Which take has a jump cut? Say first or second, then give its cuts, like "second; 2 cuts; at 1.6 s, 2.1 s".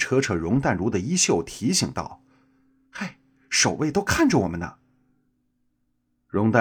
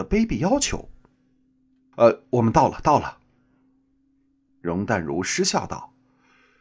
second; 2 cuts; at 1.9 s, 4.5 s